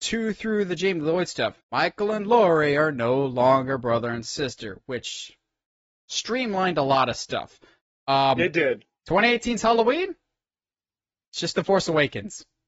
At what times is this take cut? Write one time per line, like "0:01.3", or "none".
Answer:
0:01.6